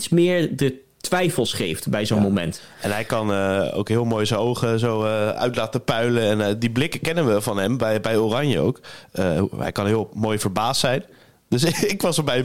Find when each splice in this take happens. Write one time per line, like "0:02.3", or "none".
none